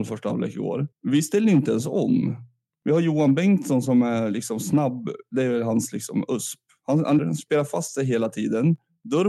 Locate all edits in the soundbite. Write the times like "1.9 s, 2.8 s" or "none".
0.9 s, 7.2 s